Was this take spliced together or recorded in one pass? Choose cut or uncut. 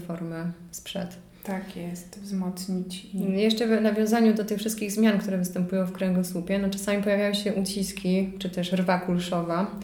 uncut